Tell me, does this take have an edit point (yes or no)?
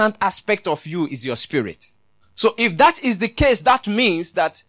yes